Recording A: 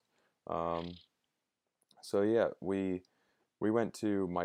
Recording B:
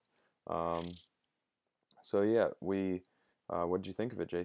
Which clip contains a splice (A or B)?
B